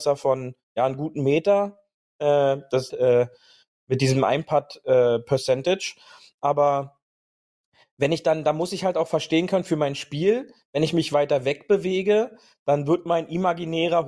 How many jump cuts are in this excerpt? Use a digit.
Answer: 1